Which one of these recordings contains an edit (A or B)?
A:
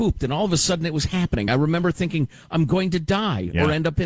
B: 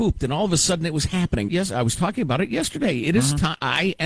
B